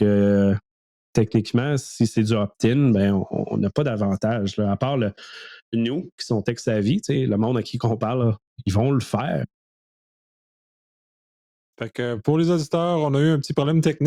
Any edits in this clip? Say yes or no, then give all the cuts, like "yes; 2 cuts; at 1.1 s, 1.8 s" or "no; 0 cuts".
no; 0 cuts